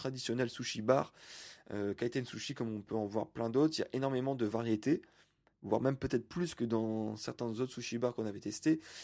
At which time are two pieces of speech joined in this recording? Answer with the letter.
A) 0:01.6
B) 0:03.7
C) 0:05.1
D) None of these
D